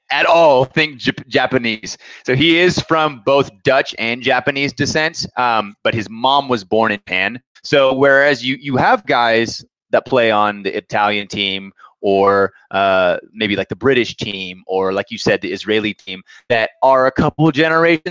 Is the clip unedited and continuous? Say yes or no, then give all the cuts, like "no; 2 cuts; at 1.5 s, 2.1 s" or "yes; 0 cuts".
yes; 0 cuts